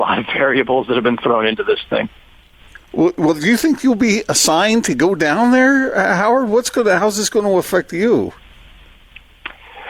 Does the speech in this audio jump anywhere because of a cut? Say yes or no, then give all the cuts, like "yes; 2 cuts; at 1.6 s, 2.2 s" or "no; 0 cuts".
no; 0 cuts